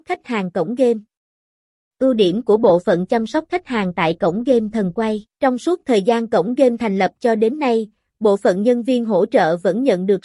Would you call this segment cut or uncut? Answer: cut